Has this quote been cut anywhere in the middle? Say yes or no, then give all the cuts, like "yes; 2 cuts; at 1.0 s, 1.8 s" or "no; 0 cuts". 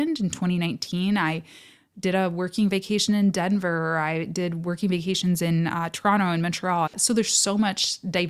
yes; 1 cut; at 6.9 s